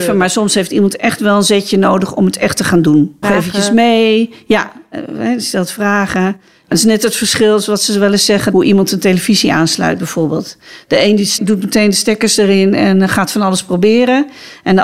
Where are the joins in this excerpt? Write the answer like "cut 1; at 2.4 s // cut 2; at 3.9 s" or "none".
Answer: cut 1; at 3.2 s